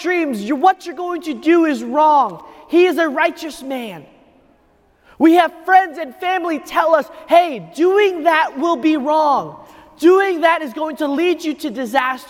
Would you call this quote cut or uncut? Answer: uncut